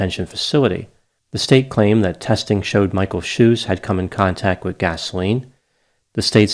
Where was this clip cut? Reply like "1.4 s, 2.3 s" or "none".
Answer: 1.2 s